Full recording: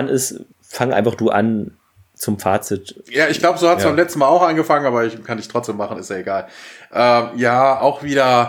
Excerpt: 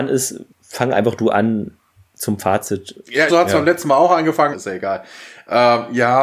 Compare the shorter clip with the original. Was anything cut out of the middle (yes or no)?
yes